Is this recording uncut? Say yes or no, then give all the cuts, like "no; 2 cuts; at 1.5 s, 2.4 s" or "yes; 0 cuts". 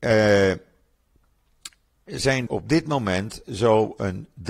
no; 1 cut; at 2.5 s